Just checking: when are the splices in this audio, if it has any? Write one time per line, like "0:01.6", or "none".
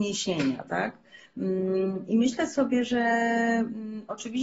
none